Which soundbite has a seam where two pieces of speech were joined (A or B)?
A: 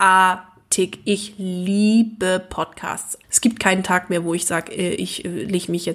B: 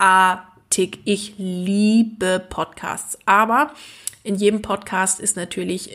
A